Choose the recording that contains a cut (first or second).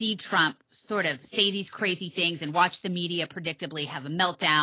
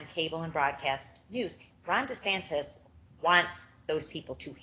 second